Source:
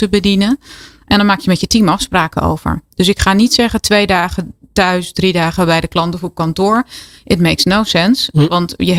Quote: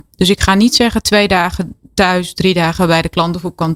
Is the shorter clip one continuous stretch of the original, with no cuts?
yes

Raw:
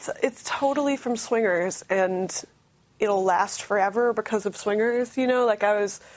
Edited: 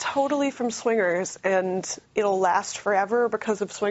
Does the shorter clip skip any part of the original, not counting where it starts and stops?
yes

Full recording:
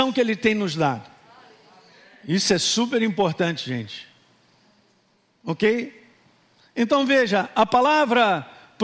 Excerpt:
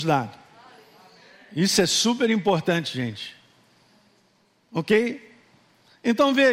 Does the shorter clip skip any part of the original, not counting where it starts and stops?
no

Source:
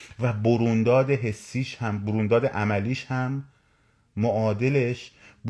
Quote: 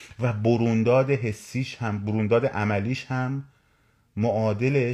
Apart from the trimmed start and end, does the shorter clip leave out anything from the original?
no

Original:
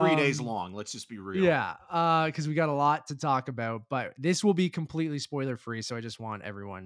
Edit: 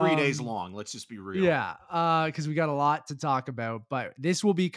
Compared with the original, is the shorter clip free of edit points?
yes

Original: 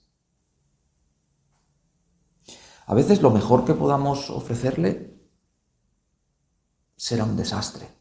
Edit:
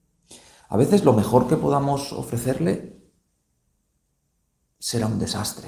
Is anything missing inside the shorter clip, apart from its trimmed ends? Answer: no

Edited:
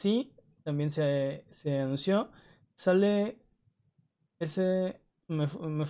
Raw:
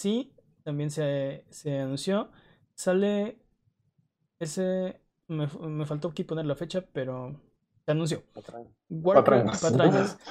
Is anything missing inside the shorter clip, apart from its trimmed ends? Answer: no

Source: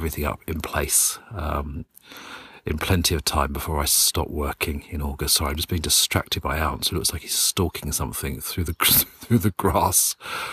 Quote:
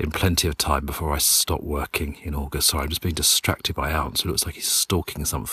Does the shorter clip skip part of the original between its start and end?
no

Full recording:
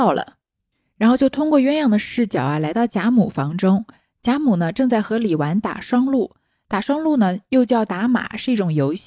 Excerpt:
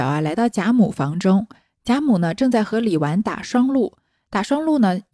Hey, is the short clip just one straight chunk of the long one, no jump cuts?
yes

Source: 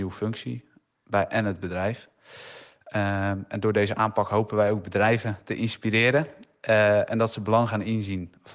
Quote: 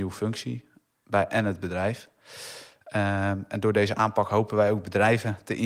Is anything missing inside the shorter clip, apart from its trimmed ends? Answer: no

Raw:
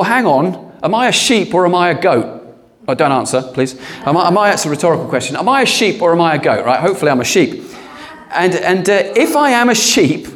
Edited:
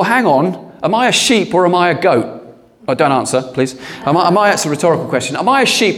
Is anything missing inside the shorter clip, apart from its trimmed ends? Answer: no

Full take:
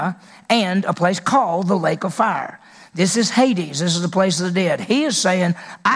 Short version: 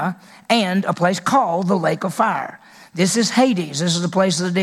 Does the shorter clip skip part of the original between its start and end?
no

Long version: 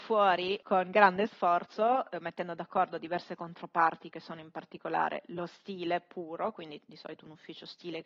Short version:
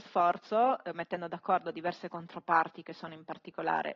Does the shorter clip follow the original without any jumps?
yes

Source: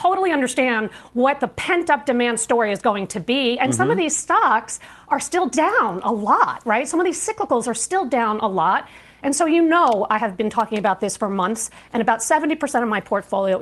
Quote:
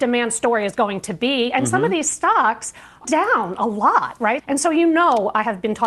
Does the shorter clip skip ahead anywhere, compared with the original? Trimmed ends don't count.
yes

